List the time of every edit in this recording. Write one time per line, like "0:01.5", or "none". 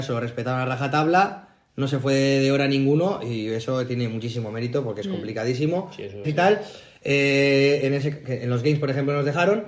0:06.2